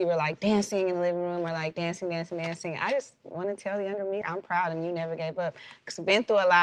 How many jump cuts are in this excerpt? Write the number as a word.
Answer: one